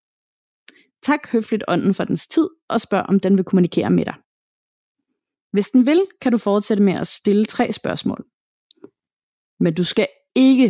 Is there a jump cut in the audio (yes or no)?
no